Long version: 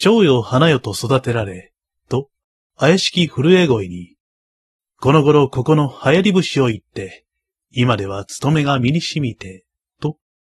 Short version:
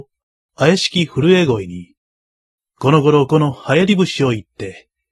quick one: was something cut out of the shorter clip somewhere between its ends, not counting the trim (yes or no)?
yes